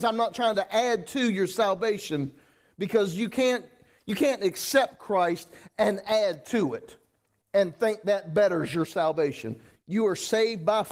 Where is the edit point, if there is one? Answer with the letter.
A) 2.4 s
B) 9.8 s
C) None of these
B